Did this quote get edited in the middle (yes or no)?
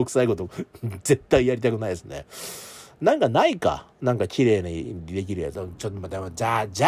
yes